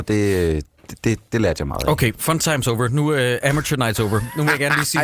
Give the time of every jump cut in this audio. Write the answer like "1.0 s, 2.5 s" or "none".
1.3 s